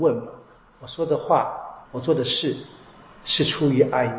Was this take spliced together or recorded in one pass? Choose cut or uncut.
cut